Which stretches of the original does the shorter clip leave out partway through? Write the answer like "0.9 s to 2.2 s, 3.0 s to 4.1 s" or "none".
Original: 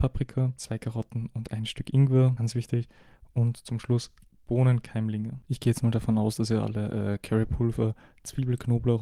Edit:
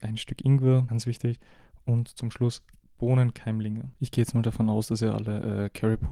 none